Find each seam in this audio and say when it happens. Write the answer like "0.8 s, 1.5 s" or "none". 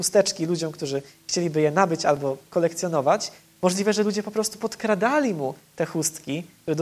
none